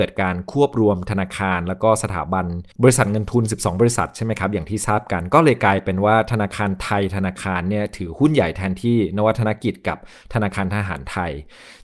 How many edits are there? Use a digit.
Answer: 1